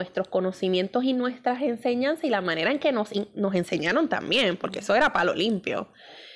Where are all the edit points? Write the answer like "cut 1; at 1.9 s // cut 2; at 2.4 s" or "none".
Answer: none